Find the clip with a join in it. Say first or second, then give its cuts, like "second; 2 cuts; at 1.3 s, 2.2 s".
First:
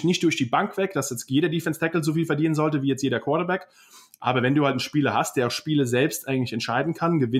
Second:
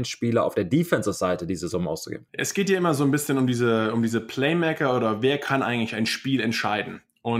second; 1 cut; at 2.3 s